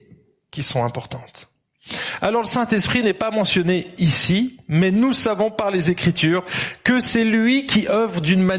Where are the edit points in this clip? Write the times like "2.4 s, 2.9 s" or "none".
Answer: none